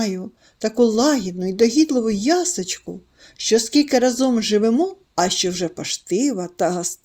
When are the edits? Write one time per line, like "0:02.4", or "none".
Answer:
0:05.1